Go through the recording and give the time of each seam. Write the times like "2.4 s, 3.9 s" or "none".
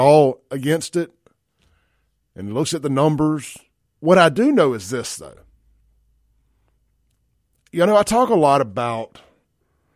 3.8 s